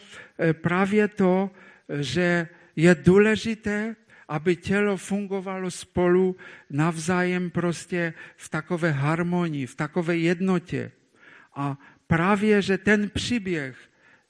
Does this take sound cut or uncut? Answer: uncut